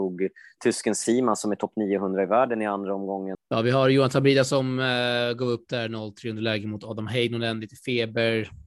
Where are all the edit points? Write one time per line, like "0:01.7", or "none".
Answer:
0:03.3

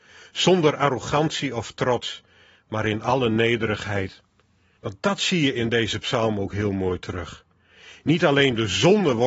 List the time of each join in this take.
0:04.8

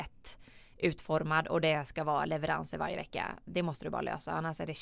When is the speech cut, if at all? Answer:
none

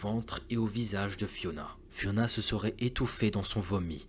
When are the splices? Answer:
0:01.9

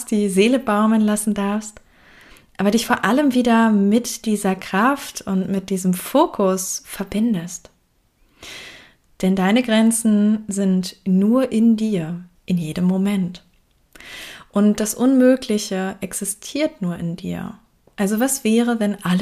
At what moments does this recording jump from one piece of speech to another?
0:12.3

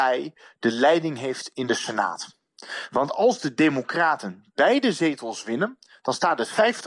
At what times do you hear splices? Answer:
none

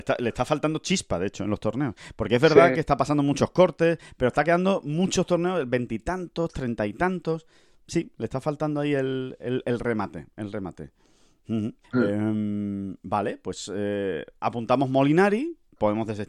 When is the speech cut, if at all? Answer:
0:11.8

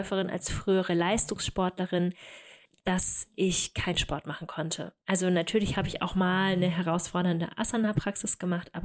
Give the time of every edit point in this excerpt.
0:05.0

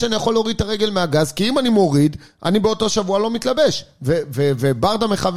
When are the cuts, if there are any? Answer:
none

